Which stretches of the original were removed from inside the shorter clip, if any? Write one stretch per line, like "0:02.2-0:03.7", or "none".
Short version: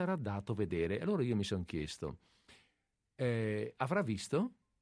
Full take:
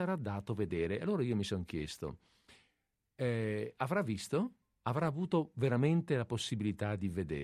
none